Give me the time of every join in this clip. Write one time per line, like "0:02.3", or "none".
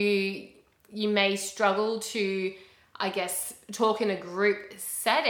none